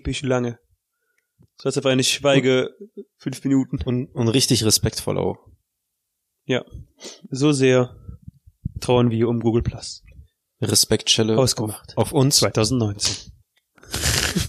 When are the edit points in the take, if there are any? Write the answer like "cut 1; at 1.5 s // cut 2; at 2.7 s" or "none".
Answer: cut 1; at 13.4 s